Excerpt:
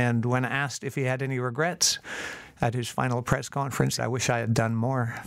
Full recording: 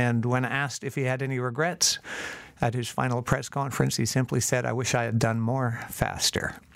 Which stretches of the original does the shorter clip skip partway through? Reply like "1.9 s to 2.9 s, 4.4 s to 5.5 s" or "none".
4.0 s to 4.6 s